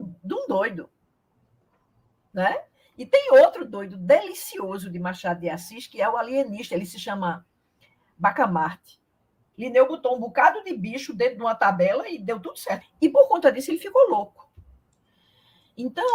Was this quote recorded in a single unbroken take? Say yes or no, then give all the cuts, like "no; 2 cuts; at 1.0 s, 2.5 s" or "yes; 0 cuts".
no; 2 cuts; at 9.5 s, 12.8 s